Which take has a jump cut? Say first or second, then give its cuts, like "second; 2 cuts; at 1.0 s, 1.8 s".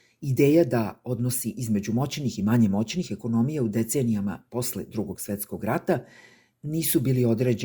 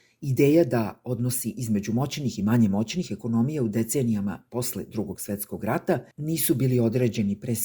second; 1 cut; at 6.1 s